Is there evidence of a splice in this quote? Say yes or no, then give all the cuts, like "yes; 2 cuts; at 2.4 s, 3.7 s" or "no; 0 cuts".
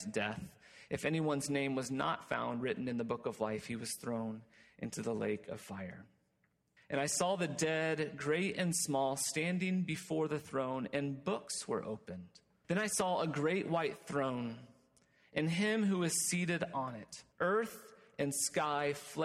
yes; 3 cuts; at 6.8 s, 12.6 s, 17.3 s